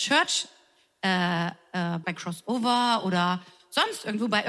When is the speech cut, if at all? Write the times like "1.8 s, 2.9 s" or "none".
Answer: 2.0 s